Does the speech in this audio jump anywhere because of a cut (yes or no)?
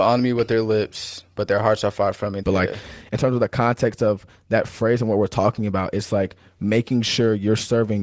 yes